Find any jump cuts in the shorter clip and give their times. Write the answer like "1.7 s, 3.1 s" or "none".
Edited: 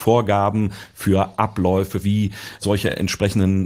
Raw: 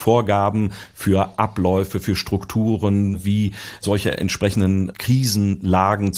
2.0 s